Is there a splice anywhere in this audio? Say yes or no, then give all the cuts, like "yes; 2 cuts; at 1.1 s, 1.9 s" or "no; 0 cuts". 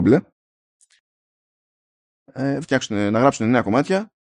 yes; 1 cut; at 2.6 s